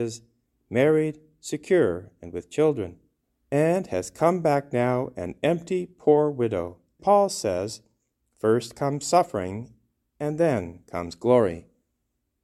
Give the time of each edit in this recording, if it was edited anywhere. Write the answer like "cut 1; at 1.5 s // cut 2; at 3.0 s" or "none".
cut 1; at 7.0 s